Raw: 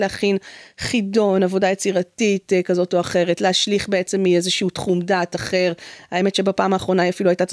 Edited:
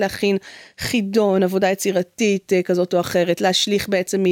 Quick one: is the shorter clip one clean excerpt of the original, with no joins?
yes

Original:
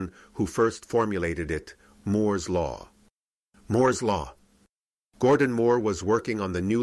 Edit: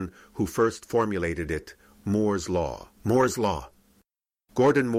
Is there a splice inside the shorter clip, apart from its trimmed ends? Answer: yes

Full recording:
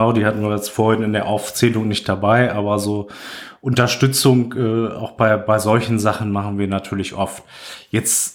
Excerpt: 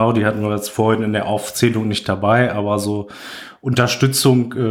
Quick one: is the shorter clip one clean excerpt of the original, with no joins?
yes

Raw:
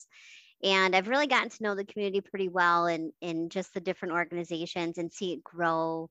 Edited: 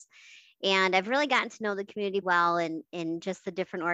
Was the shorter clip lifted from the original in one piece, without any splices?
no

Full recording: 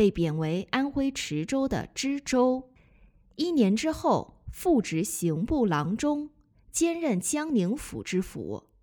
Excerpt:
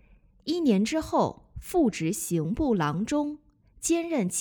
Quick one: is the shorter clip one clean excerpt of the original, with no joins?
yes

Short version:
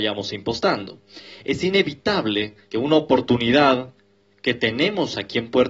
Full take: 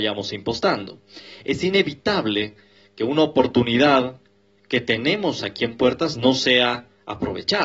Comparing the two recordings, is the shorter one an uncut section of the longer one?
no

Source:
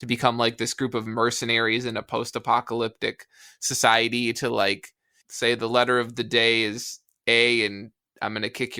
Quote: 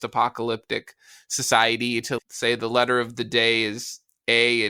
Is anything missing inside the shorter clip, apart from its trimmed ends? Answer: yes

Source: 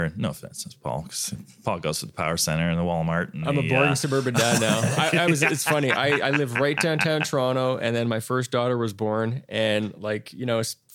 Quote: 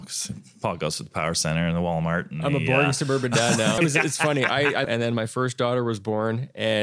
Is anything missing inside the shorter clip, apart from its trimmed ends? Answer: yes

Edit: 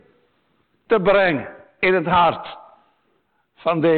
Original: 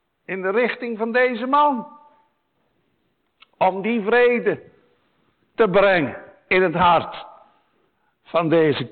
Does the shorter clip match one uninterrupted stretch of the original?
yes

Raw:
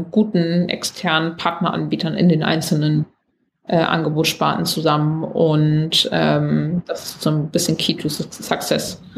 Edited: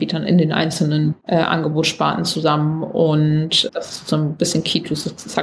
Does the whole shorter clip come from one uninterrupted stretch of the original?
no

